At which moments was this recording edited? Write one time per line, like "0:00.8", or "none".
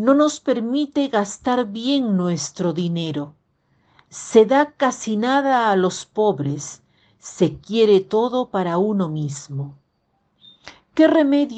none